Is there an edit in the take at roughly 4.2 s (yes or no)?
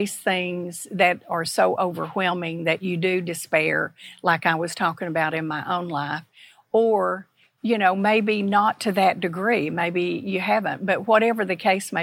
no